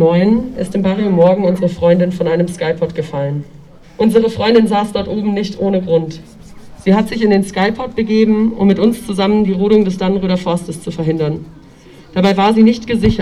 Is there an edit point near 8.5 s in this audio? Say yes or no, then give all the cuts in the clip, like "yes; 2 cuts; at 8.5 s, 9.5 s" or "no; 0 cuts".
no; 1 cut; at 3.8 s